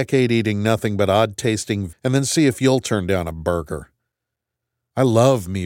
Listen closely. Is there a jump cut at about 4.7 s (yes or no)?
no